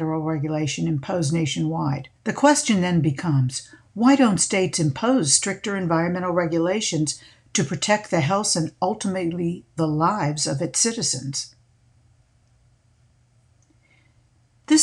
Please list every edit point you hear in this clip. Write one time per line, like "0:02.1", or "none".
0:02.1